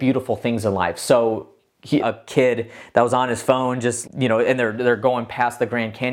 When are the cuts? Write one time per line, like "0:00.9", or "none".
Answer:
0:02.0
0:04.0